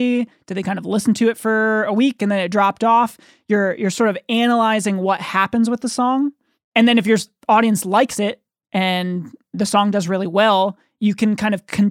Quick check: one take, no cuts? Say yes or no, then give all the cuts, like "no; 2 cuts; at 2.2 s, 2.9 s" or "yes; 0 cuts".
yes; 0 cuts